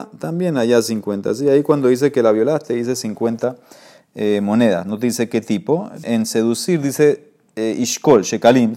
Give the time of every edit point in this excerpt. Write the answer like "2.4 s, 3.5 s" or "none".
6.0 s